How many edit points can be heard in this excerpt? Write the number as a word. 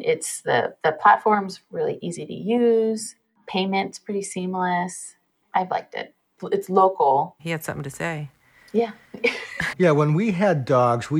two